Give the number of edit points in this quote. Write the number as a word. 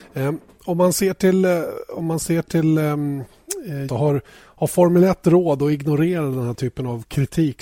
one